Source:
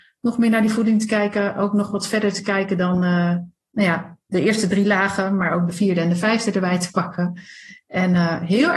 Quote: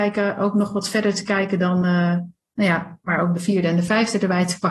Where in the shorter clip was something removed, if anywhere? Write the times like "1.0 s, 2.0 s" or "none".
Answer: 3.1 s